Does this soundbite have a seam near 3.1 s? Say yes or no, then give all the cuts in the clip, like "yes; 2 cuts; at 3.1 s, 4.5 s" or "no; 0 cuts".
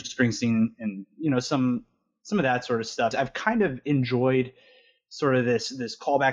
yes; 1 cut; at 3.1 s